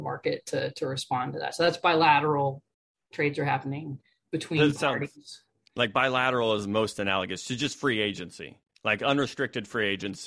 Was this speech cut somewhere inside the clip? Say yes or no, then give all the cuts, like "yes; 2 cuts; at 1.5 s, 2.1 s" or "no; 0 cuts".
no; 0 cuts